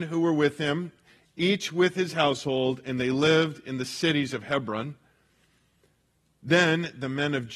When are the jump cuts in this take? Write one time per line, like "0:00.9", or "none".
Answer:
none